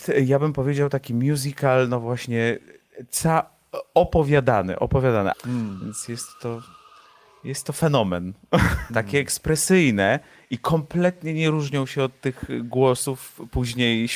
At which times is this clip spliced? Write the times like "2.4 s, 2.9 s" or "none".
5.3 s, 8.9 s